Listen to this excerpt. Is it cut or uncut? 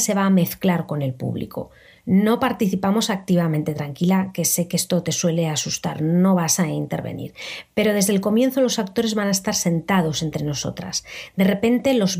uncut